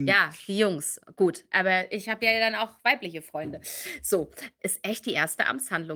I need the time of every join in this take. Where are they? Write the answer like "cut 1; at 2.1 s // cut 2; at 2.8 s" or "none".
cut 1; at 4.6 s